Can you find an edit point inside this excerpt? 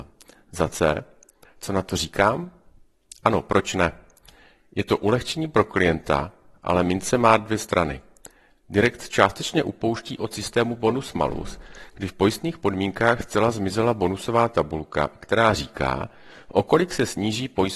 yes; 1 cut; at 1.4 s

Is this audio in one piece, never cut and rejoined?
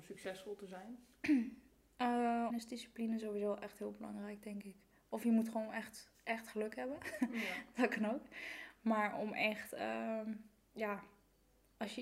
no; 1 cut; at 2.5 s

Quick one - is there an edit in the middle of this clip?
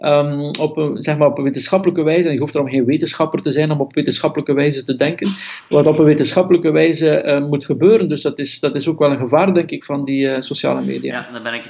no; 0 cuts

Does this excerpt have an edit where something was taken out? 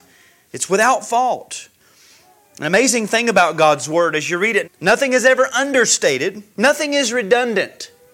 yes; 2 cuts; at 4.6 s, 6.5 s

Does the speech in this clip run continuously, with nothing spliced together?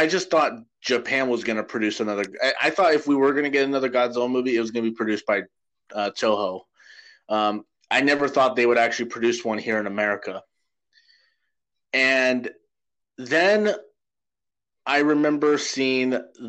yes; 0 cuts

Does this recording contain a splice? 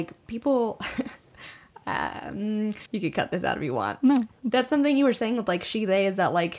yes; 1 cut; at 2.9 s

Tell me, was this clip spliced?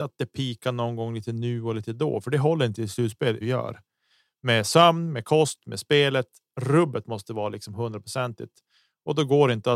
yes; 1 cut; at 3.4 s

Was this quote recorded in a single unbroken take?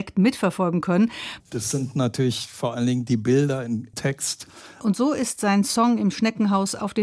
no; 2 cuts; at 1.4 s, 4.8 s

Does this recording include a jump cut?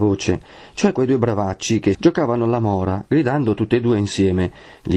yes; 1 cut; at 1.9 s

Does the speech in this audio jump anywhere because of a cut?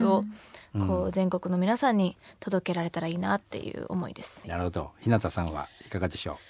yes; 1 cut; at 4.4 s

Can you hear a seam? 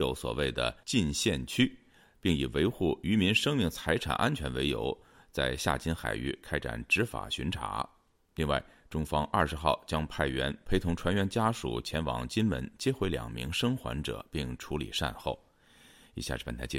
no; 0 cuts

